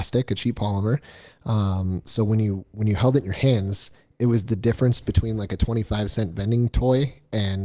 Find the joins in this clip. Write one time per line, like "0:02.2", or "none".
none